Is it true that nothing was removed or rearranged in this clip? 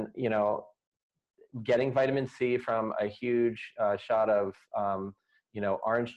yes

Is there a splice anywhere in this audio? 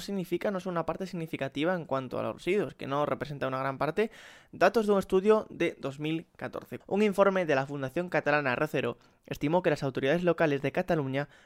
yes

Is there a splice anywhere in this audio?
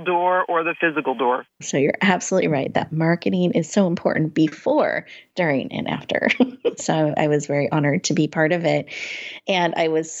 yes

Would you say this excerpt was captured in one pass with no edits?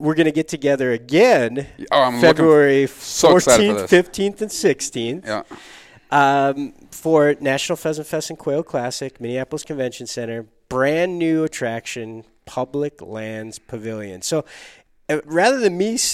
yes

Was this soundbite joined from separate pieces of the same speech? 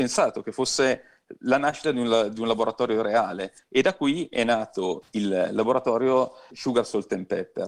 yes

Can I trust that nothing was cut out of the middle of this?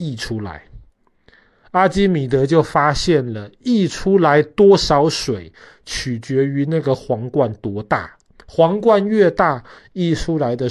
yes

